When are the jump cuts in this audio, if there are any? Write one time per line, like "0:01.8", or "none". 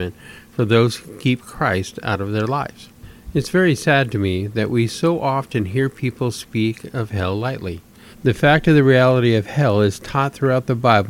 0:08.1